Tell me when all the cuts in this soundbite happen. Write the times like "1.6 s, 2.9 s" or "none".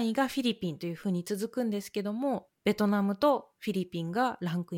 2.5 s